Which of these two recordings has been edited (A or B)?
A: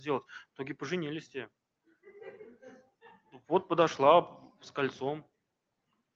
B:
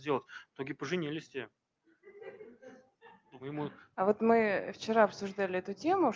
B